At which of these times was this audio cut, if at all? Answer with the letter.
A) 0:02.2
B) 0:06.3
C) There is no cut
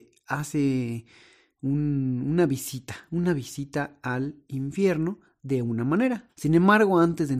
B